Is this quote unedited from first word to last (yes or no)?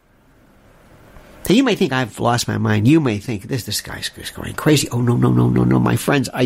yes